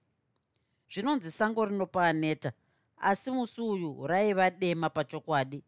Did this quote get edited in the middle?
no; 0 cuts

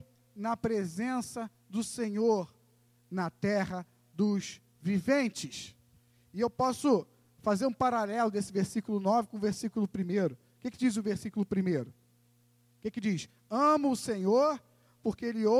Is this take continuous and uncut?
yes; 0 cuts

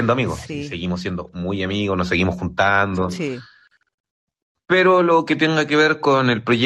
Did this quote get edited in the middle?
no; 0 cuts

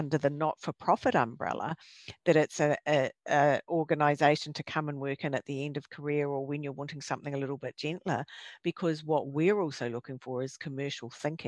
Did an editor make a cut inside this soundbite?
no; 0 cuts

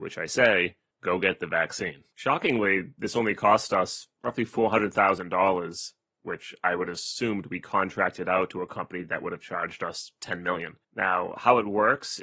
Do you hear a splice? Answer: yes; 2 cuts; at 2.1 s, 10.8 s

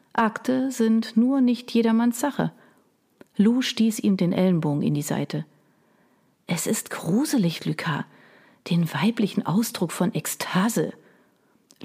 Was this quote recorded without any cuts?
no; 1 cut; at 7.6 s

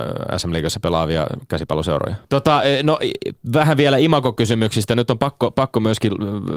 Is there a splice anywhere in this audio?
yes; 1 cut; at 2.2 s

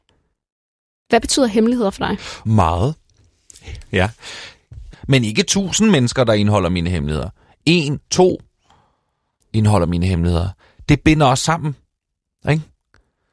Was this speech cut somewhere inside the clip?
yes; 2 cuts; at 2.4 s, 4.9 s

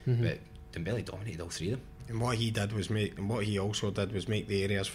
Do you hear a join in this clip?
no; 0 cuts

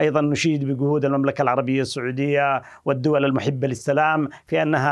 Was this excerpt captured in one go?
yes; 0 cuts

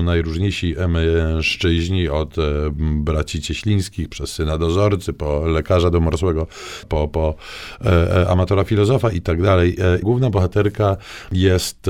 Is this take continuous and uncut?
no; 2 cuts; at 6.8 s, 10.0 s

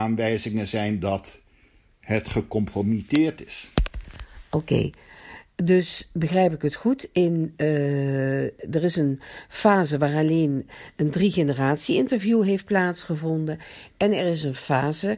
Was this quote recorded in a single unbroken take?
yes; 0 cuts

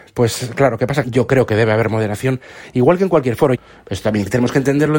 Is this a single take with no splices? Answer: no; 2 cuts; at 1.0 s, 3.5 s

